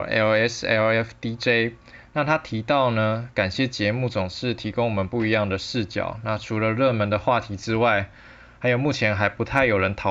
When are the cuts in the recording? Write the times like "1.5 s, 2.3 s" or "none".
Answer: none